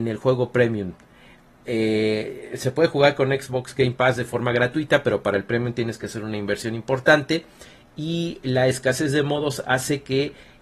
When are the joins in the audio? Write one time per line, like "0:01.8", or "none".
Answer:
none